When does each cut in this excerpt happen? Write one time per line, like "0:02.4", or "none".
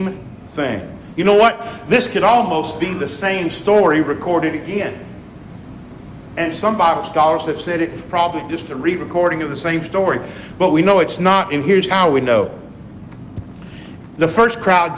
none